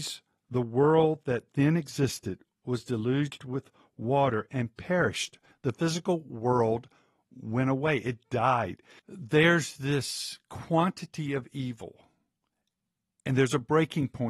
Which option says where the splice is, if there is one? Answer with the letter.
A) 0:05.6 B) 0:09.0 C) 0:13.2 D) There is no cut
B